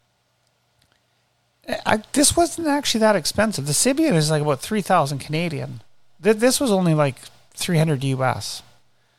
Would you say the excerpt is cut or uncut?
uncut